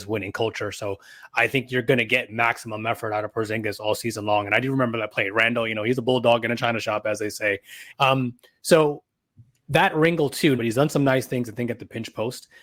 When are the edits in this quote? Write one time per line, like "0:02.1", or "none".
0:07.9
0:10.6